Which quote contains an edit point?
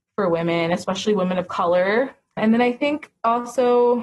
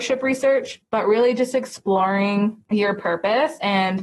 first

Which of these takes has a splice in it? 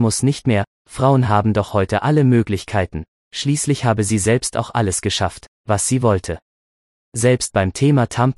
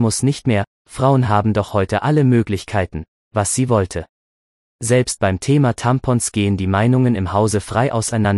second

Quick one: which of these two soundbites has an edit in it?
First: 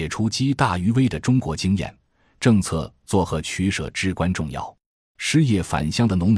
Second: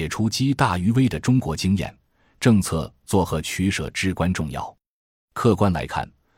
first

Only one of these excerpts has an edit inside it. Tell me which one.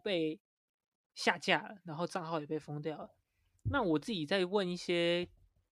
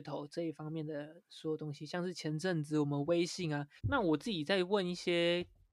second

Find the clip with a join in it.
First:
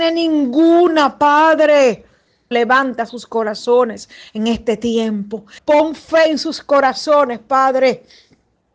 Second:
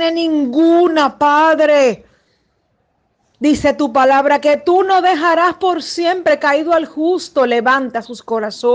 first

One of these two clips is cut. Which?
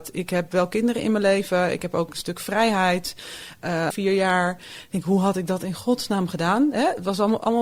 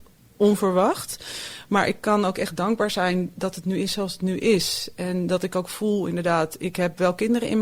first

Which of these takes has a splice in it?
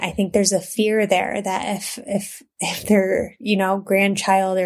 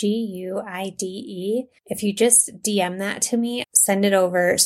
second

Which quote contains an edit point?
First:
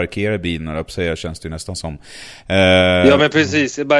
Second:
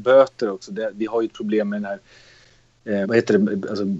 second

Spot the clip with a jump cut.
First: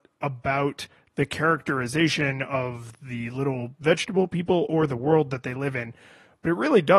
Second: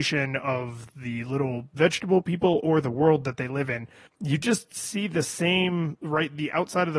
second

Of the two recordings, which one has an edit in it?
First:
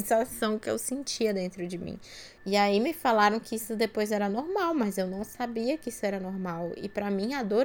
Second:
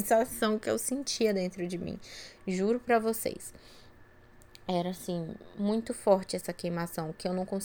first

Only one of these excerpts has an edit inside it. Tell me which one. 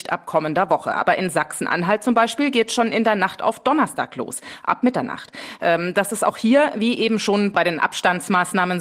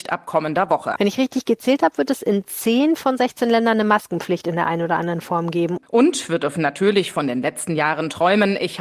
second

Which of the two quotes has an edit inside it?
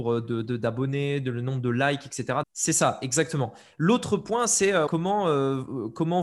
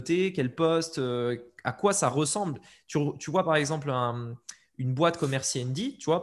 first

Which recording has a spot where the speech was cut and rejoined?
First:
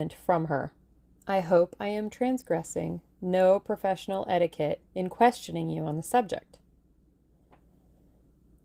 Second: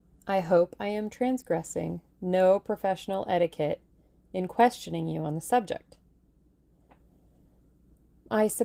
first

